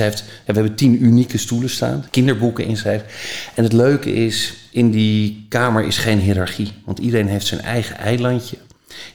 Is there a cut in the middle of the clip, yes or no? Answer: yes